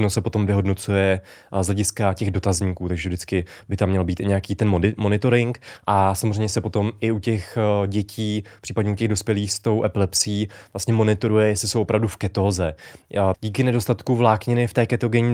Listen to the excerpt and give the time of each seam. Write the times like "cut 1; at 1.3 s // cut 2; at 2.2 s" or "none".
cut 1; at 13.3 s